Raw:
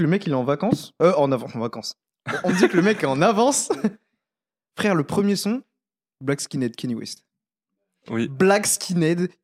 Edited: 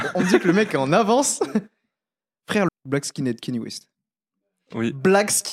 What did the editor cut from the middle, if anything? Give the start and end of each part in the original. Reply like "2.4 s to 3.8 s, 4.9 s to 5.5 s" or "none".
5.0 s to 6.0 s